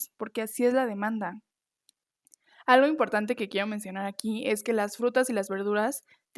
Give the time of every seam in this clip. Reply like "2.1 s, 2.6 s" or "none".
none